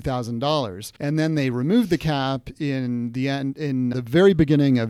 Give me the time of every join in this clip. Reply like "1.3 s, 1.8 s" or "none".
1.0 s, 3.9 s